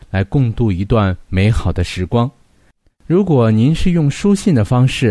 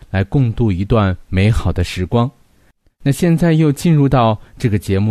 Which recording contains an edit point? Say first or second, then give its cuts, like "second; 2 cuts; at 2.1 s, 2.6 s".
first; 1 cut; at 3.0 s